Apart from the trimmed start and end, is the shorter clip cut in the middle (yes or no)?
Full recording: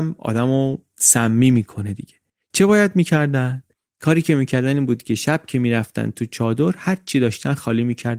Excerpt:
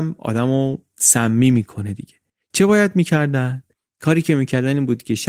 no